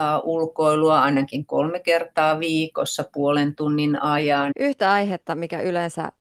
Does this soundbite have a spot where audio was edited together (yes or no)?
yes